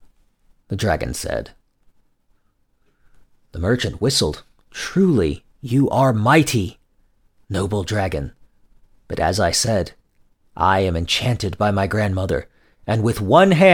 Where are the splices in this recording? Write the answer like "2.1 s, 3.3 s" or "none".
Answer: none